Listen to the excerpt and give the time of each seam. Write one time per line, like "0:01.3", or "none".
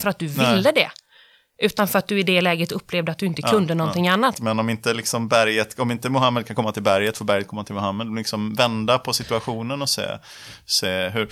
0:04.3